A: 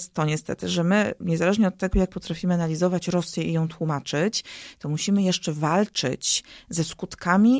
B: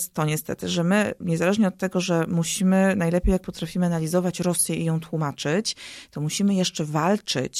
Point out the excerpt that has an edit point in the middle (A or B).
A